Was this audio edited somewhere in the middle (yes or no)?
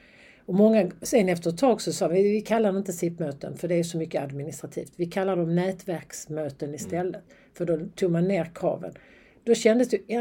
no